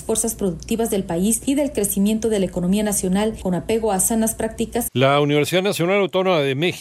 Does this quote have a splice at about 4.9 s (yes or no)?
yes